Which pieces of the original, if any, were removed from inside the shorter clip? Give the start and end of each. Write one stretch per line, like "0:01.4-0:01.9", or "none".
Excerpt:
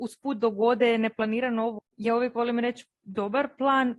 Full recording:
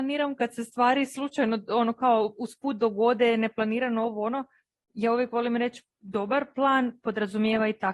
0:04.2-0:04.8